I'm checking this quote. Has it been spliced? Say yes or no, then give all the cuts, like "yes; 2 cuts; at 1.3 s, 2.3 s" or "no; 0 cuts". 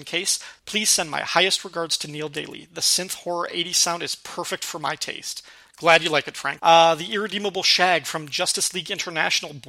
yes; 1 cut; at 6.6 s